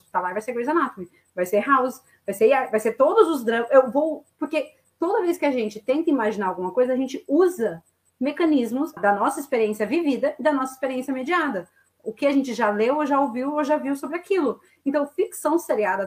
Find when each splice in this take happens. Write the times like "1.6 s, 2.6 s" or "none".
9.0 s